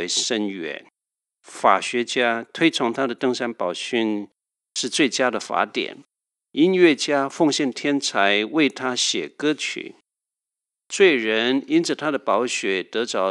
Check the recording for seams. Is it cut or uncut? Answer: uncut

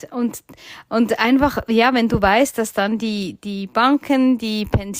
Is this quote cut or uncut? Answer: uncut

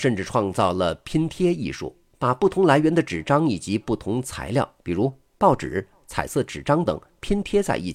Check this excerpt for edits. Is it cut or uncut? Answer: cut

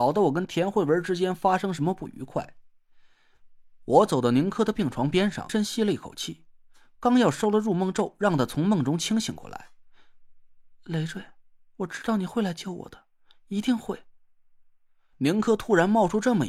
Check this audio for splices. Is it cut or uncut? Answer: cut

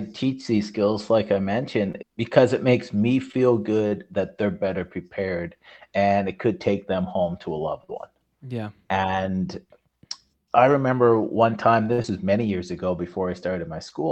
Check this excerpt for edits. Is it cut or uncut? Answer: cut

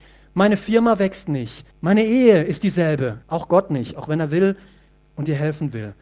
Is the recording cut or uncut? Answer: cut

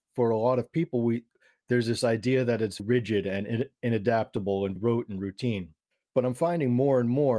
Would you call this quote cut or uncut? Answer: cut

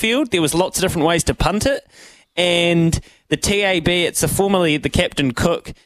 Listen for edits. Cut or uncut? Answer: uncut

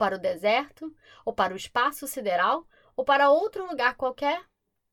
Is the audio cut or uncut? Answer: uncut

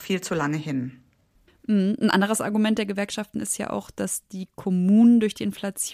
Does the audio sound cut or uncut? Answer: uncut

